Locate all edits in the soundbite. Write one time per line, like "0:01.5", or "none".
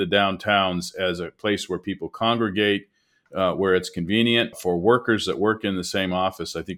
0:03.3
0:04.5